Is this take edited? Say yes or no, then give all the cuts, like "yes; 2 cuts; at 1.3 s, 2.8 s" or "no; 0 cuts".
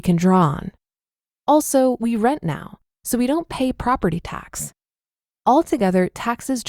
no; 0 cuts